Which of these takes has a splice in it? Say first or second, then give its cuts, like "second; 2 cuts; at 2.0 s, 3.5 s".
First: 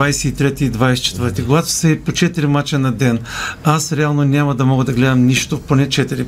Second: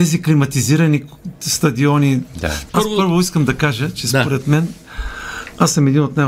second; 1 cut; at 2.7 s